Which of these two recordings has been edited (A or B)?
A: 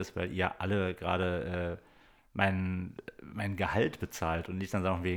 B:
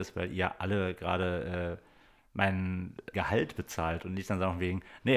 B